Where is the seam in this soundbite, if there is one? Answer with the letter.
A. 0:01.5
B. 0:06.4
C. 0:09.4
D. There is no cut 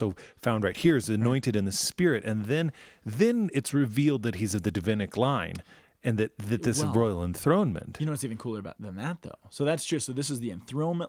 D